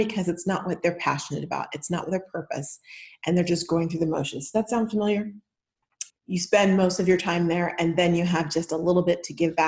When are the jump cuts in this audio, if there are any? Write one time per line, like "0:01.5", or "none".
0:06.1